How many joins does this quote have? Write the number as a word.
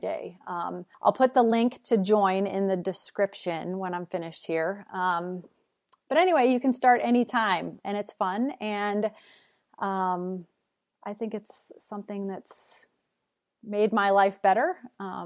two